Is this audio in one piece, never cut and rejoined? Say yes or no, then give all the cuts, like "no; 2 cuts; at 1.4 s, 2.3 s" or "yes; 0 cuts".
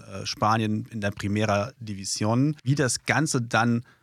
no; 1 cut; at 2.6 s